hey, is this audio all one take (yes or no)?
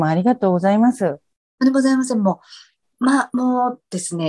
yes